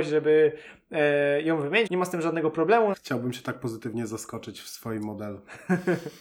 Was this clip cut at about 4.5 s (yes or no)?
no